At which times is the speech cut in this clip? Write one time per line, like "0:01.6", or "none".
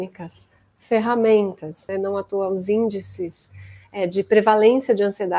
0:01.9